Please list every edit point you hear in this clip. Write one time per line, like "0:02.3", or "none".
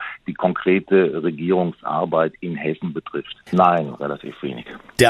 0:03.5

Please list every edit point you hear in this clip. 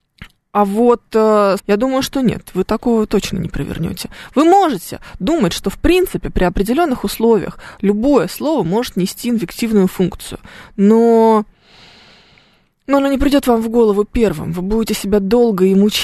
0:01.6

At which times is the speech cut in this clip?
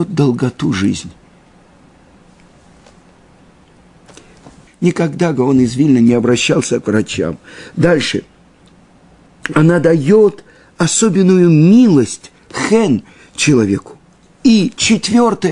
0:04.7

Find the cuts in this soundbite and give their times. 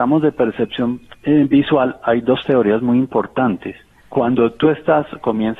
0:04.0

